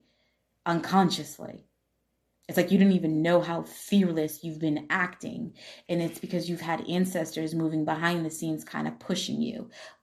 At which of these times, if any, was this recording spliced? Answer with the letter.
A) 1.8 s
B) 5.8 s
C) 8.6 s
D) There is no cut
D